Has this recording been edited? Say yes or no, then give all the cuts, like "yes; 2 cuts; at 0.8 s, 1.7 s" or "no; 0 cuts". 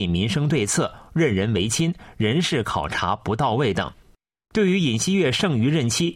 no; 0 cuts